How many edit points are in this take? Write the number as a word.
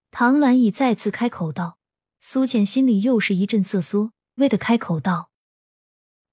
one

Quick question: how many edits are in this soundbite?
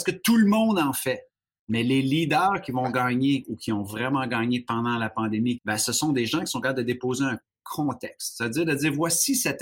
two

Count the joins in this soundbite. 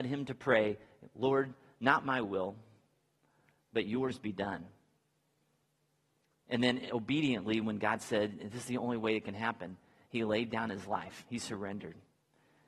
zero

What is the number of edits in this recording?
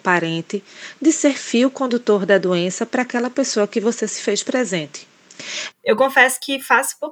one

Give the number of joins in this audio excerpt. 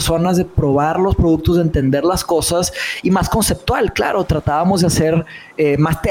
zero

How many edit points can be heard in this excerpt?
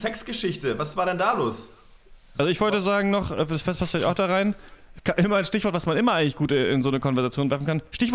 zero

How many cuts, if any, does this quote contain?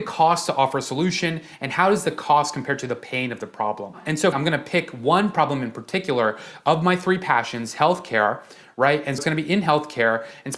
two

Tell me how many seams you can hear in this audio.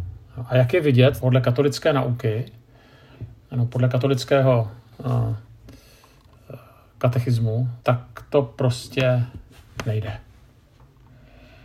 two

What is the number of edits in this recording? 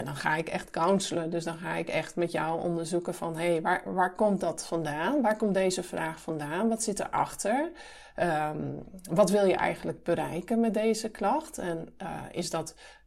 zero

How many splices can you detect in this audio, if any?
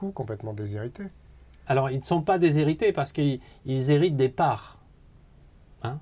zero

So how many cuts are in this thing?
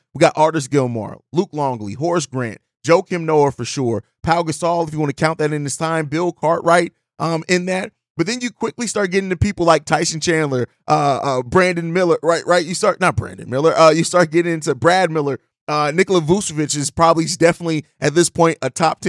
zero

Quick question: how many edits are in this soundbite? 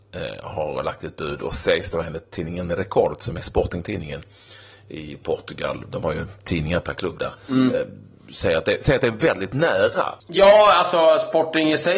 one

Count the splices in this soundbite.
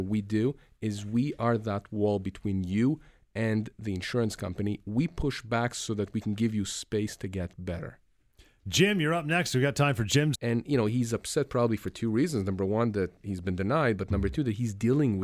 one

